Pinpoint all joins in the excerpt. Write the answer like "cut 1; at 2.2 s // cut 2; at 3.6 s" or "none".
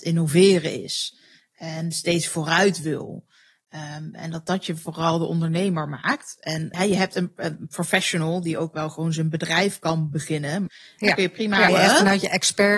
cut 1; at 6.7 s // cut 2; at 10.7 s // cut 3; at 11.7 s